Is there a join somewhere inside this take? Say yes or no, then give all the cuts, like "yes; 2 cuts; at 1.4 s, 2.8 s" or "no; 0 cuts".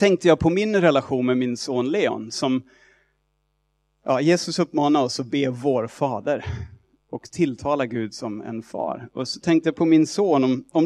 no; 0 cuts